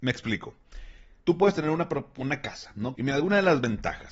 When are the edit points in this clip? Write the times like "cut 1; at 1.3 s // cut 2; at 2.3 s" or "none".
cut 1; at 1.2 s // cut 2; at 3.0 s